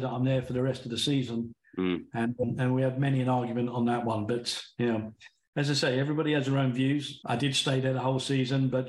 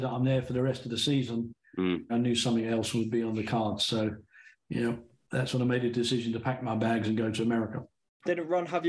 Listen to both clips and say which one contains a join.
second; 1 cut; at 2.1 s

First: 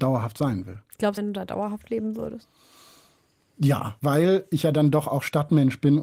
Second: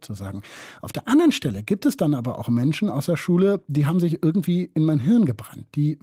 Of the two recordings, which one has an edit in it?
first; 2 cuts; at 1.2 s, 4.0 s

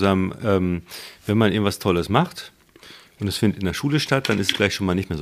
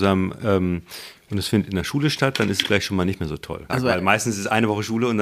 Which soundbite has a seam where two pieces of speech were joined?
second; 2 cuts; at 1.1 s, 3.7 s

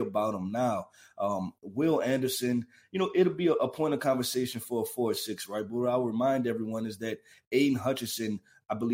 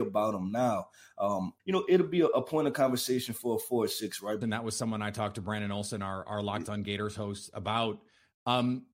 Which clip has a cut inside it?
second; 2 cuts; at 1.6 s, 4.4 s

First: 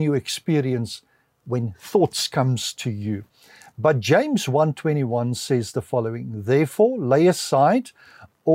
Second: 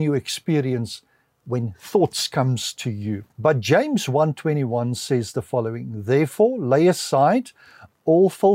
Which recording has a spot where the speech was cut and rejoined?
second; 1 cut; at 3.3 s

